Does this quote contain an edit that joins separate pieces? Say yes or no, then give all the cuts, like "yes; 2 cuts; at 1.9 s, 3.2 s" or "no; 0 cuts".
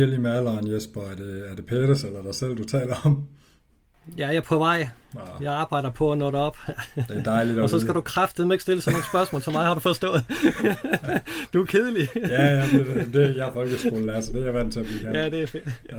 no; 0 cuts